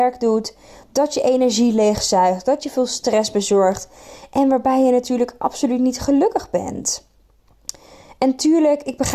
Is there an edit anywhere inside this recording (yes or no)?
no